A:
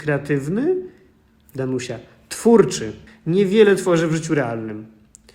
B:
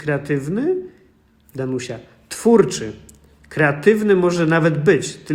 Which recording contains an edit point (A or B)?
A